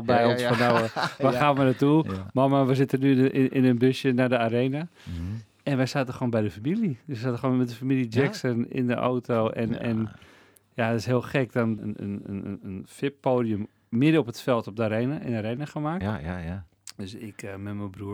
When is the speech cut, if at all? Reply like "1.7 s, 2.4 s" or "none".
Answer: 11.8 s, 16.0 s